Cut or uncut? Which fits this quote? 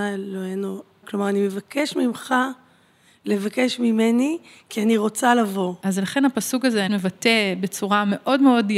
cut